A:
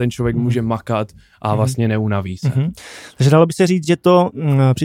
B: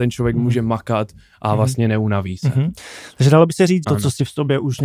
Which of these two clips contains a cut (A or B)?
B